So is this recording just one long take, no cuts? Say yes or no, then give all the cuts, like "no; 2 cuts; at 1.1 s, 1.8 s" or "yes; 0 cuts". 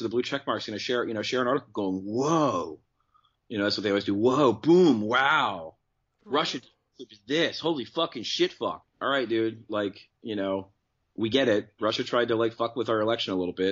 no; 1 cut; at 8.8 s